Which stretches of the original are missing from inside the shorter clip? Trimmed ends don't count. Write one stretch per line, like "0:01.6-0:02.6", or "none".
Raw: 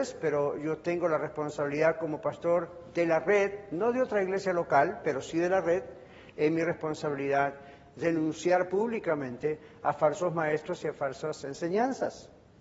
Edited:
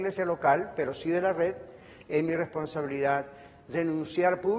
none